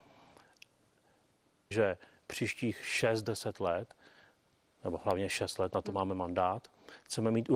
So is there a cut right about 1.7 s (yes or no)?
yes